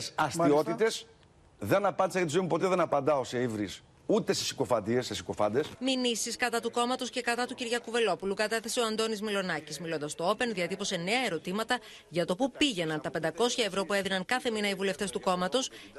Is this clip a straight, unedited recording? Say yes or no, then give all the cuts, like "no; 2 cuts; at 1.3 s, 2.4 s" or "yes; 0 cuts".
yes; 0 cuts